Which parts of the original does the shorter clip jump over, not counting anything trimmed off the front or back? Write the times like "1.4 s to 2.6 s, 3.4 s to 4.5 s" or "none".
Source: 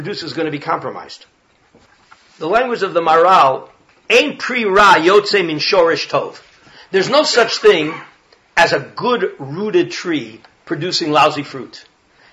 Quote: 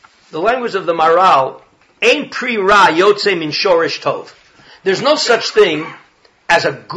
none